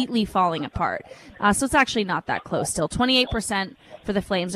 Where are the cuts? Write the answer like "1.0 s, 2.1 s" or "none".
1.3 s